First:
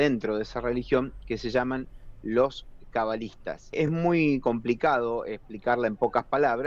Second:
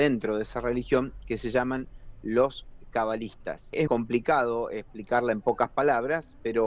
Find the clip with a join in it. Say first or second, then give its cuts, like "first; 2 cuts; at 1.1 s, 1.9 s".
second; 1 cut; at 3.9 s